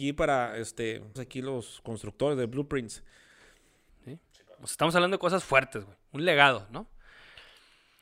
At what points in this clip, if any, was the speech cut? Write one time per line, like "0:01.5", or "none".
0:01.2
0:03.9